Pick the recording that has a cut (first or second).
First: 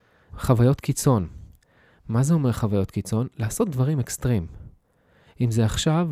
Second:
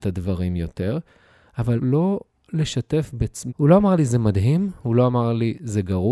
second